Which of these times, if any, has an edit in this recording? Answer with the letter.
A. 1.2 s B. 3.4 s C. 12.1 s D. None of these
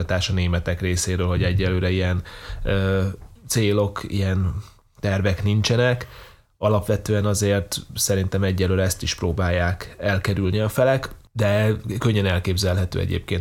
B